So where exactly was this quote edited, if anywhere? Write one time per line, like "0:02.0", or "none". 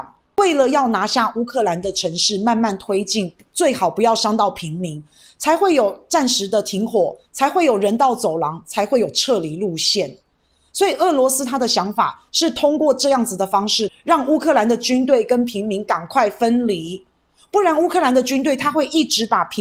0:07.3
0:13.9